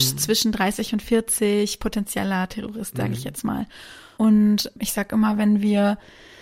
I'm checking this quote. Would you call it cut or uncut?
uncut